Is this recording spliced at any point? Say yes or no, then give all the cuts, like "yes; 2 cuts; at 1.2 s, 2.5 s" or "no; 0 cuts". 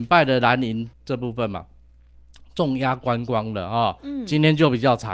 yes; 1 cut; at 0.9 s